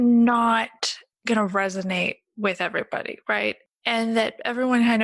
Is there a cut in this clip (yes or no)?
no